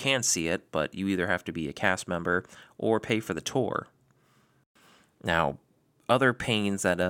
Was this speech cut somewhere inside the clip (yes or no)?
no